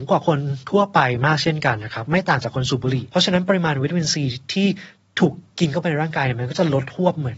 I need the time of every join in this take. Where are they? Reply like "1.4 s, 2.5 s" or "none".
5.5 s